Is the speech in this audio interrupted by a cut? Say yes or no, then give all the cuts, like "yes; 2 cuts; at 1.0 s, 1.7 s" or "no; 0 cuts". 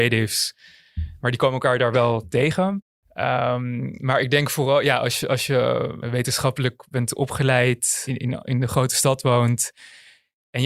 no; 0 cuts